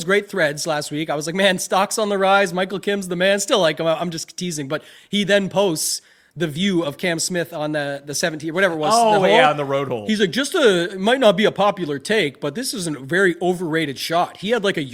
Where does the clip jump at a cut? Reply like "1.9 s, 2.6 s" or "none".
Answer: none